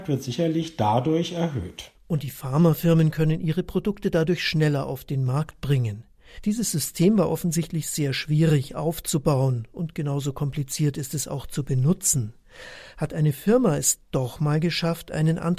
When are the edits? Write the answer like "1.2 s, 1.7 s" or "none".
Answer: 6.4 s